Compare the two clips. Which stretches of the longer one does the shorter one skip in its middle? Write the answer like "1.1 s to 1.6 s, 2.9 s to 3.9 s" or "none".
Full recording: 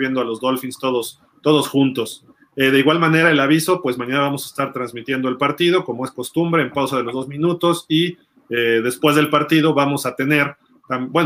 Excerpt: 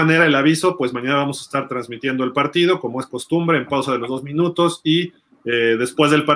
none